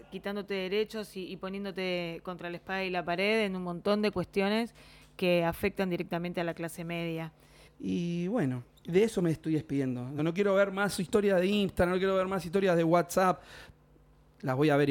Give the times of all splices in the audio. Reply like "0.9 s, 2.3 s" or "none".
7.7 s, 10.2 s